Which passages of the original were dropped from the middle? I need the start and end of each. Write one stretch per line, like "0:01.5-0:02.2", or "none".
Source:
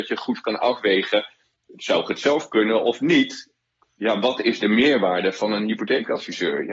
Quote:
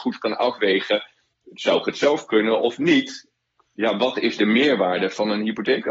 none